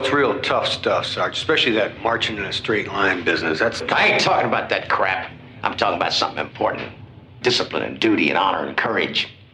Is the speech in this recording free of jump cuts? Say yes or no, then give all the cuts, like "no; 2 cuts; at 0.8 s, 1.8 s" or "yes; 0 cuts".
no; 1 cut; at 7.4 s